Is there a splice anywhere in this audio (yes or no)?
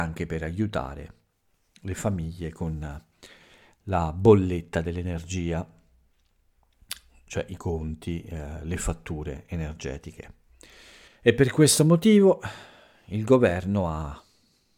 yes